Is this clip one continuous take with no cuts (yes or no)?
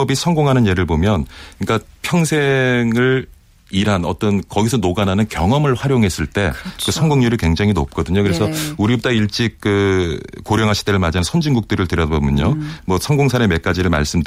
no